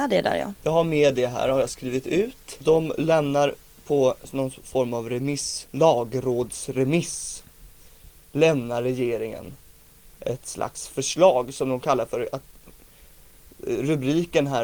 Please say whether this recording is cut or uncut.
uncut